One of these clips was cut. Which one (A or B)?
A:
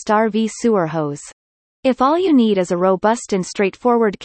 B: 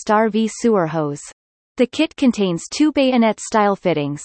B